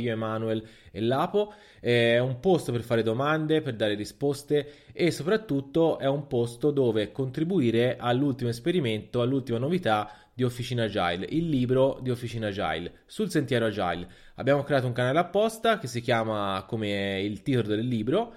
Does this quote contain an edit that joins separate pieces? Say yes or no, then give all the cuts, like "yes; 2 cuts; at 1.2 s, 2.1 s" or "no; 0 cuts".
no; 0 cuts